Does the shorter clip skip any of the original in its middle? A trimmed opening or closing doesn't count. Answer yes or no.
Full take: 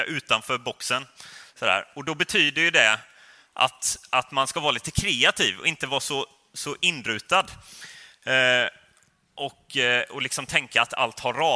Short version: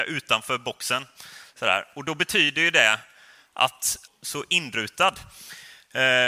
yes